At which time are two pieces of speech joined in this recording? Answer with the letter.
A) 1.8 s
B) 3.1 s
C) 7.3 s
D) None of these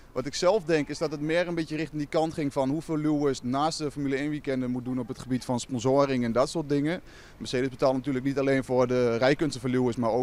D